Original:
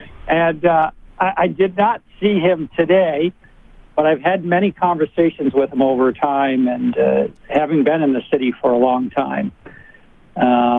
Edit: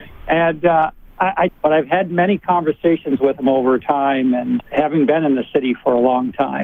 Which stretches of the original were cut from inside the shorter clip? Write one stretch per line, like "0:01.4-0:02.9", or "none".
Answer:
0:01.5-0:03.8
0:06.9-0:07.4